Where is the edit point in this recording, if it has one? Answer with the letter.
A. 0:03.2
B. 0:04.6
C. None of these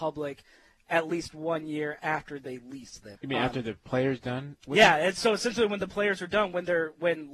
A